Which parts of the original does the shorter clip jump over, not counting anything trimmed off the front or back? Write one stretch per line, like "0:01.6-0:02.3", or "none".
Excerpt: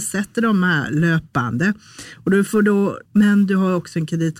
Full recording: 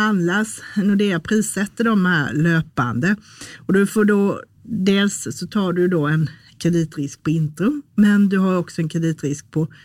0:04.5-0:07.9